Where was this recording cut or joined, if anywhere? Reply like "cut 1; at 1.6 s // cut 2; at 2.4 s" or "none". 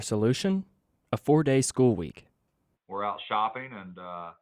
cut 1; at 2.7 s

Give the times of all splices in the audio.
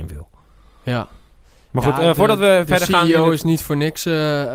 none

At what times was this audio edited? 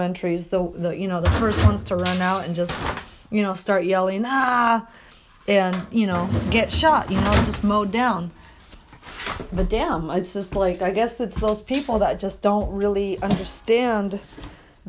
none

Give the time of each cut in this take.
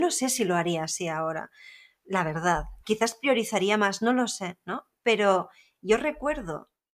none

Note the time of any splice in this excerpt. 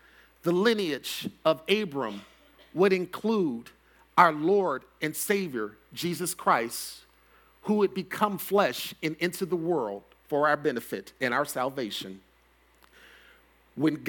none

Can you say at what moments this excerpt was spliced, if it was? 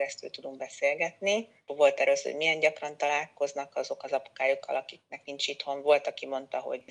none

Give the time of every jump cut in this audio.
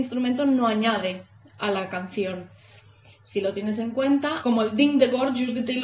cut 1; at 4.4 s

